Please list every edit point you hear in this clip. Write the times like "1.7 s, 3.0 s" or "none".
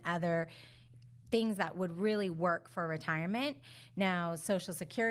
none